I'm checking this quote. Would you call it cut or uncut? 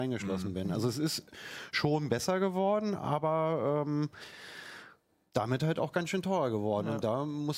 uncut